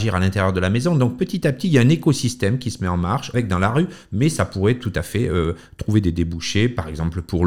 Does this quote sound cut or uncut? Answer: cut